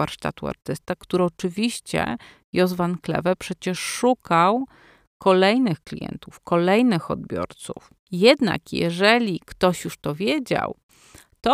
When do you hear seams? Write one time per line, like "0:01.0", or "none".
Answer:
0:08.1